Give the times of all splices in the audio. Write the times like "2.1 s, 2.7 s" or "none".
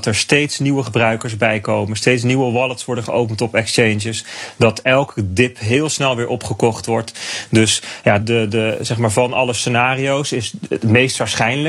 8.2 s